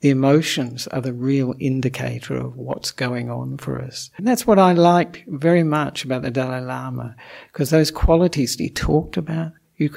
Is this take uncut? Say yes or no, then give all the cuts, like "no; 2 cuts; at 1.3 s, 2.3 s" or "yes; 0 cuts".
no; 1 cut; at 4.2 s